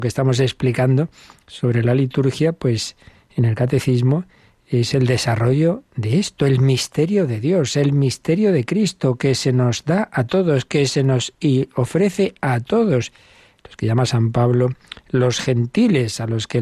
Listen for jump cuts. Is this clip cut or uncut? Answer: uncut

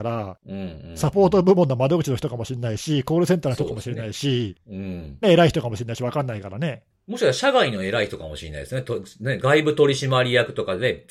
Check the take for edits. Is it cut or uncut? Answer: cut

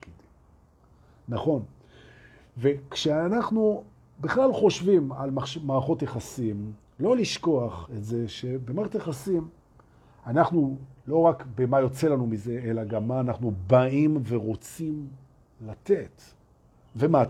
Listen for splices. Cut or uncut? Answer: uncut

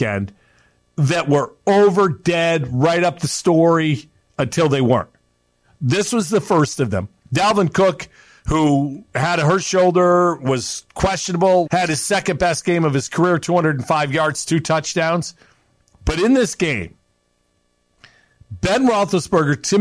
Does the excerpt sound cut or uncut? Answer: cut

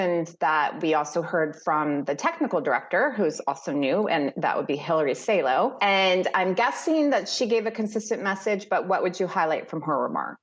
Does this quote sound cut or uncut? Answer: uncut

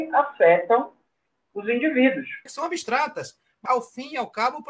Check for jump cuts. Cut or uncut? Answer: cut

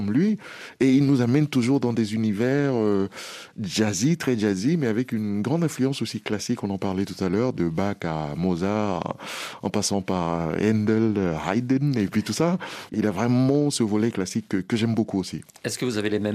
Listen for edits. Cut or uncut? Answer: cut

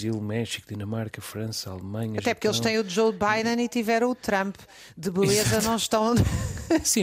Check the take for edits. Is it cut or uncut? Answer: uncut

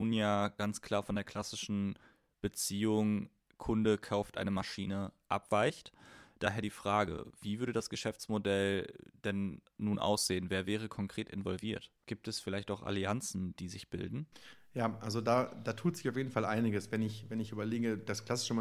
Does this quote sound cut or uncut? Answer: uncut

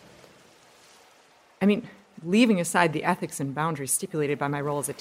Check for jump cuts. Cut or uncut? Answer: uncut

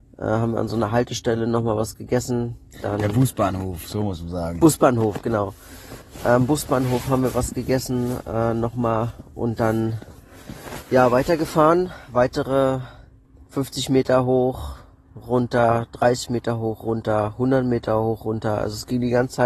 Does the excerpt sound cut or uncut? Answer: uncut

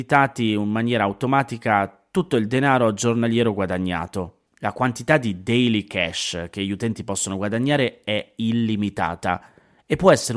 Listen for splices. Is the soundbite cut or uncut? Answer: cut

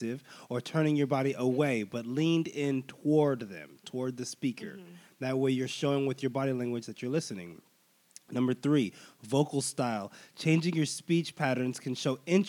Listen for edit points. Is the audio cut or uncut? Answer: uncut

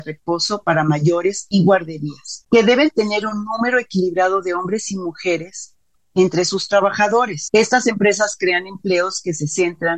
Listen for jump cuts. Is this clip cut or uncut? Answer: cut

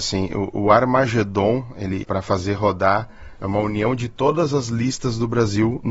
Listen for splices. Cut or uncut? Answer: cut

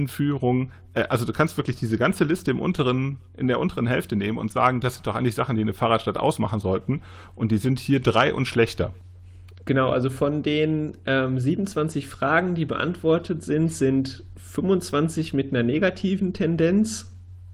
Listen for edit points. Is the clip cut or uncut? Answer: uncut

